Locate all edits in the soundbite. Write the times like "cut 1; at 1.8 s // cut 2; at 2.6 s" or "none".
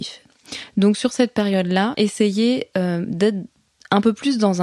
cut 1; at 1.9 s